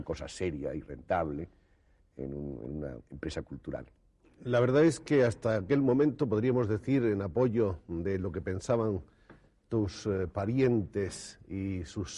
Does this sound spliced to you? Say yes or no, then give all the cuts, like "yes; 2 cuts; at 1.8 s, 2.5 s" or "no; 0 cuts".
no; 0 cuts